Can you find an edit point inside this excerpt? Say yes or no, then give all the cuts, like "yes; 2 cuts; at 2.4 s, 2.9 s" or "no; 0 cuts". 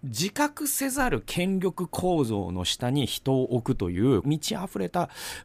yes; 1 cut; at 4.2 s